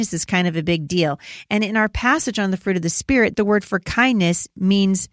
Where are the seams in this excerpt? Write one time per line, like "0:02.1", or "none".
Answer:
0:03.4

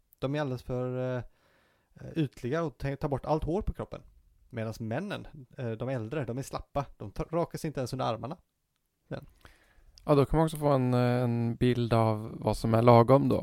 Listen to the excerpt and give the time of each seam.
none

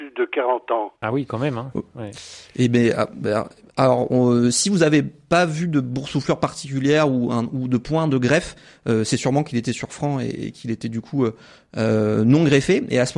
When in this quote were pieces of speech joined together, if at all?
0:01.0

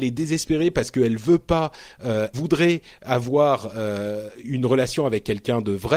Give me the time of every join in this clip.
0:02.3
0:04.4

